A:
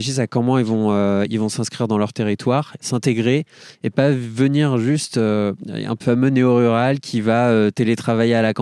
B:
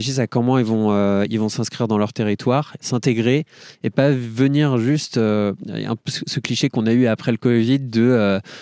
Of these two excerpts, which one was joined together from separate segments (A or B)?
A